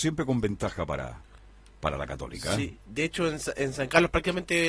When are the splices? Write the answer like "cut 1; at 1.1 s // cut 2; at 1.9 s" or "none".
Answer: none